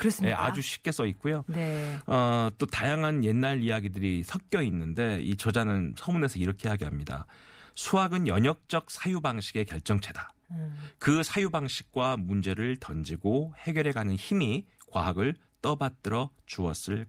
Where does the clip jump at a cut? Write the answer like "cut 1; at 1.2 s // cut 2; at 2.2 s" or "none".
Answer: none

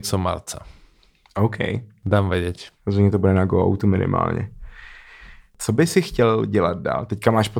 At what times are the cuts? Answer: cut 1; at 2.8 s

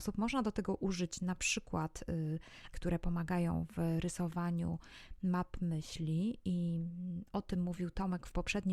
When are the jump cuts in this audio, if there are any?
cut 1; at 2.7 s

